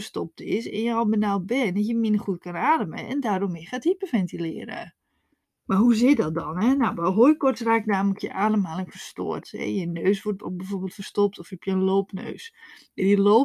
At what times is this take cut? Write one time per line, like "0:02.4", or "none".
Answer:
0:05.6
0:09.4